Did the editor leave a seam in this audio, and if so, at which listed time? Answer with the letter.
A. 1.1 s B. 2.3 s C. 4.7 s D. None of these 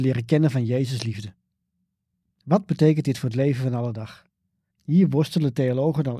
C